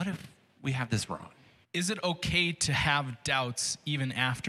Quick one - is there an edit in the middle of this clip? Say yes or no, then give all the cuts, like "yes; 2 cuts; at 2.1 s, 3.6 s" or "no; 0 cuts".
yes; 1 cut; at 1.6 s